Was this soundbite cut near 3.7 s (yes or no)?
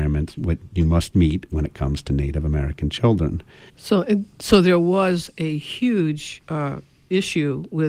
yes